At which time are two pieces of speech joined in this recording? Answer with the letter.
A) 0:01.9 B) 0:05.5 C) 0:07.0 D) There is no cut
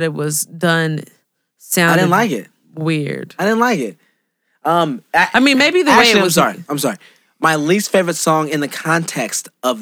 D